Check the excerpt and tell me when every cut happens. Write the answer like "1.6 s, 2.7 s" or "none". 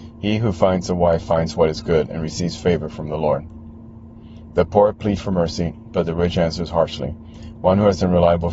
none

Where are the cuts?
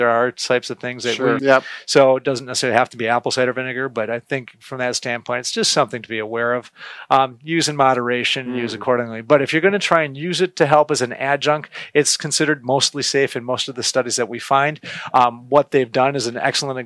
1.4 s

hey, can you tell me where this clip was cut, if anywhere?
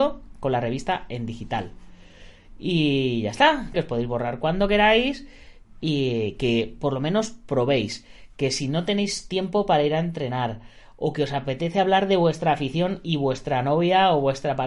3.7 s

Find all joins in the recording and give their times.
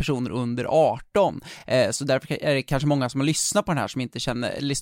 none

